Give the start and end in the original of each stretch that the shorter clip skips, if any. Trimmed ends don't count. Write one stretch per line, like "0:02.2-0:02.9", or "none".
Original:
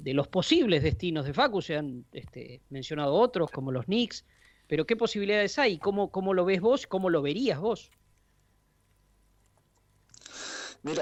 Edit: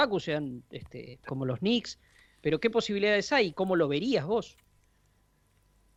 0:02.7-0:03.5
0:05.8-0:06.9